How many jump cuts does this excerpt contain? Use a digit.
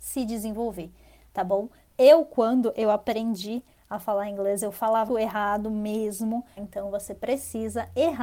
3